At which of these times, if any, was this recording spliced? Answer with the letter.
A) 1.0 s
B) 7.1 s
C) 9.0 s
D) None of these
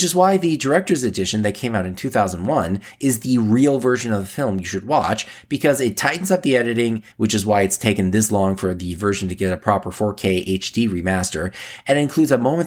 B